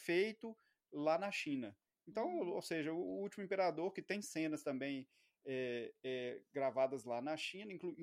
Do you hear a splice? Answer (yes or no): no